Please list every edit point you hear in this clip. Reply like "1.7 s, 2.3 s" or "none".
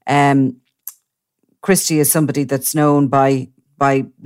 none